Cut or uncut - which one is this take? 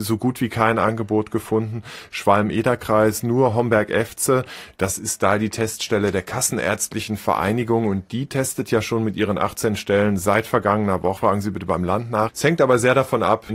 cut